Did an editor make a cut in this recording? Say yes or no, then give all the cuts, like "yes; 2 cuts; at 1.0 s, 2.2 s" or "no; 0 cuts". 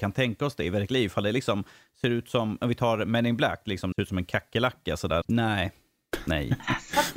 yes; 2 cuts; at 3.9 s, 5.2 s